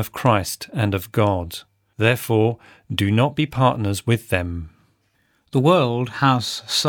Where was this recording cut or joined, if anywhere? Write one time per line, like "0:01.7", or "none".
0:01.9